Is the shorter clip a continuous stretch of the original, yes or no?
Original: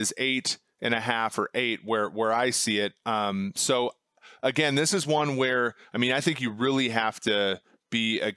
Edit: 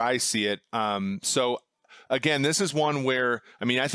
yes